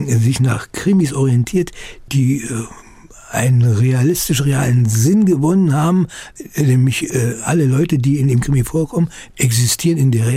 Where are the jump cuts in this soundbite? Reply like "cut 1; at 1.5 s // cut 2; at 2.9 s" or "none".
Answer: none